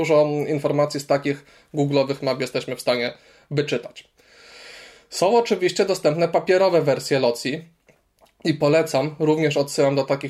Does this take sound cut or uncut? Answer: uncut